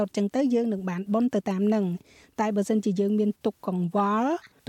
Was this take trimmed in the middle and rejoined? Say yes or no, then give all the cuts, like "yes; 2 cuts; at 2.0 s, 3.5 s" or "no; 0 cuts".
no; 0 cuts